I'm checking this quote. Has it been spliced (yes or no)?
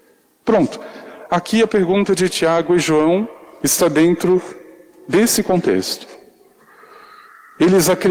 no